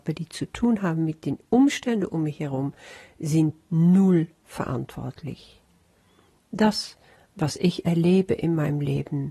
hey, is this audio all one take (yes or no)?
yes